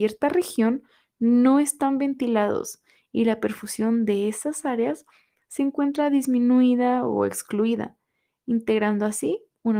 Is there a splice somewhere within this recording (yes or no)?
no